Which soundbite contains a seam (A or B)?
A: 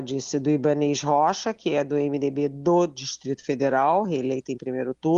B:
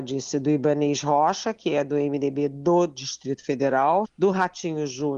B